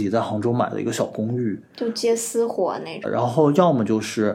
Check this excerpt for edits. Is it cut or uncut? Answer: cut